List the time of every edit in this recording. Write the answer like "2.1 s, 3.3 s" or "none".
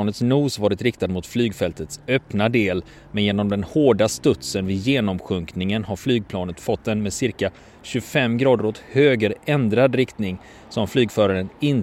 none